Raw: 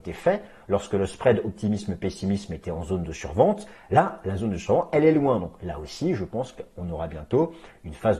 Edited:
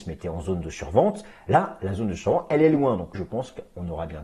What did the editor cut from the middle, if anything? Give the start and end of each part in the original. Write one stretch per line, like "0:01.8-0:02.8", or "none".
0:05.6-0:06.2